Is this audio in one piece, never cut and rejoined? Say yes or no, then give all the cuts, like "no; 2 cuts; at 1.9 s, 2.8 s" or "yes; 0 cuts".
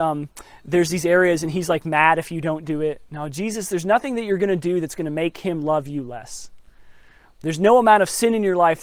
yes; 0 cuts